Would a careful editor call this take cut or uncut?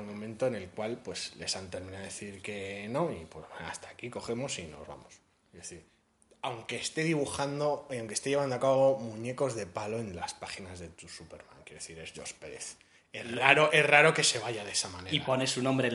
cut